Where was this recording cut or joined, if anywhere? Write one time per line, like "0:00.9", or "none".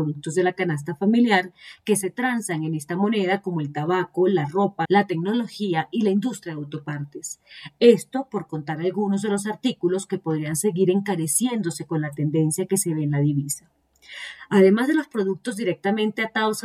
0:04.8